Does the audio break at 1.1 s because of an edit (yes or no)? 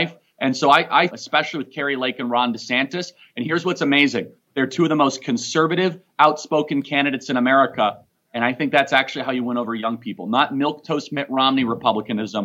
yes